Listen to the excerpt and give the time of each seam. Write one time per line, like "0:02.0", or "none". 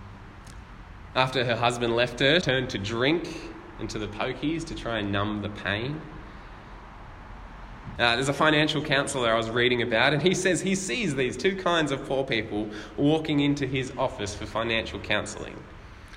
0:02.4
0:08.0

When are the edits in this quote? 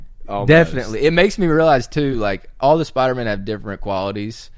none

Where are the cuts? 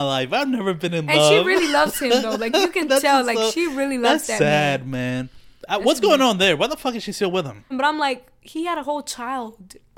0:07.7

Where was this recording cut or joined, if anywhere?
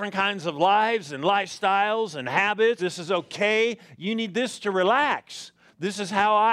0:02.8

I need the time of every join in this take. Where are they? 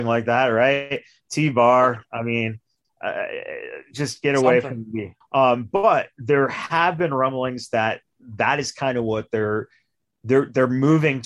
0:05.2

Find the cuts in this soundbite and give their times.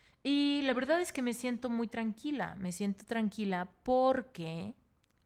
none

